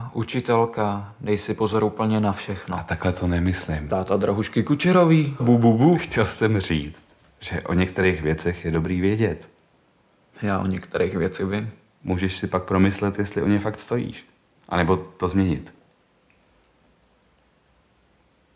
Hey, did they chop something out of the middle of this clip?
yes; 1 cut; at 5.4 s

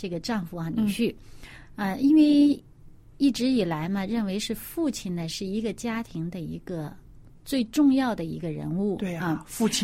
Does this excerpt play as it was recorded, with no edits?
yes; 0 cuts

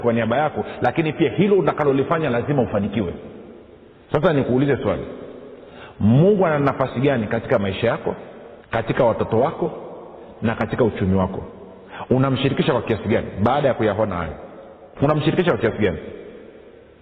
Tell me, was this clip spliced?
yes; 2 cuts; at 8.6 s, 14.9 s

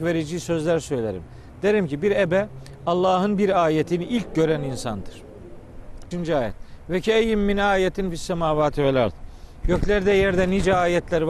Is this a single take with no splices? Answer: no; 1 cut; at 6.1 s

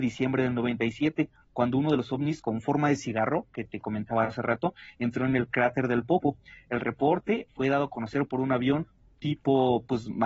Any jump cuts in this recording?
no; 0 cuts

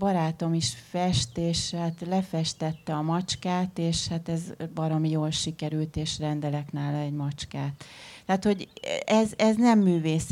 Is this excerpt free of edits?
yes; 0 cuts

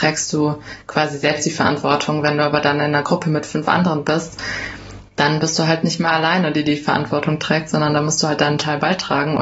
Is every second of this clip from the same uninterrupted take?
yes; 0 cuts

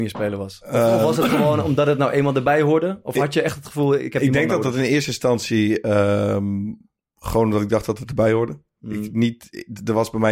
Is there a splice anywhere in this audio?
no; 0 cuts

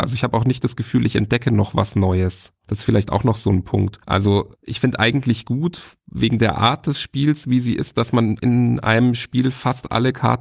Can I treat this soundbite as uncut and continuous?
yes; 0 cuts

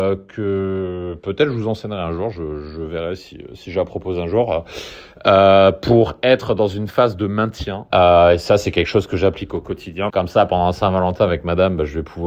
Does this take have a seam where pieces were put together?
yes; 2 cuts; at 7.9 s, 10.1 s

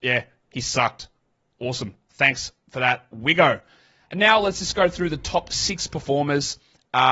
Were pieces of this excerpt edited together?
no; 0 cuts

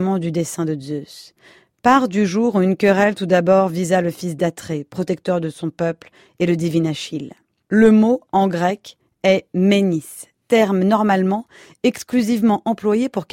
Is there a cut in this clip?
no; 0 cuts

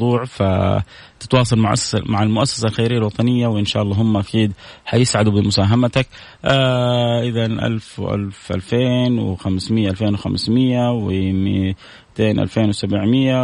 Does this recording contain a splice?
no; 0 cuts

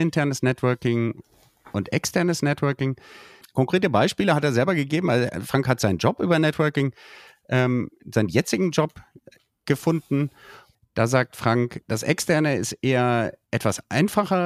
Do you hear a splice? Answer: yes; 3 cuts; at 3.4 s, 10.7 s, 11.8 s

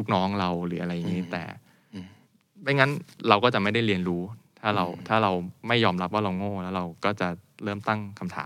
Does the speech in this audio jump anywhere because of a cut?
no; 0 cuts

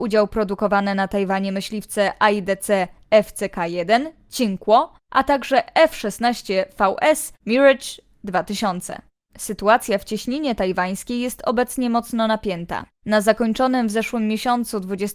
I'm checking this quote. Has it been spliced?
no; 0 cuts

